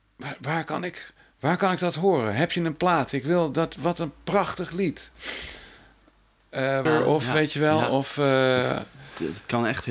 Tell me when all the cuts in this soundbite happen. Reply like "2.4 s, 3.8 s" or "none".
6.9 s